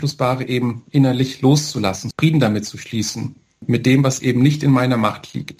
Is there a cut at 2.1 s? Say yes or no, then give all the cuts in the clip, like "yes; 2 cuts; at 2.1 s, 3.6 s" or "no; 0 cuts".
yes; 1 cut; at 2.1 s